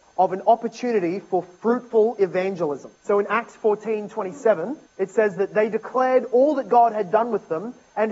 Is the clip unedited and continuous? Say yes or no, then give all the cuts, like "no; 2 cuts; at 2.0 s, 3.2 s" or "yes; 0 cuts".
no; 2 cuts; at 3.0 s, 4.9 s